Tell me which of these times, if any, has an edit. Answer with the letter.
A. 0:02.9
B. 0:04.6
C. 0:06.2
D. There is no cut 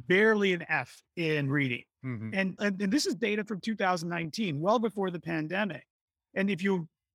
D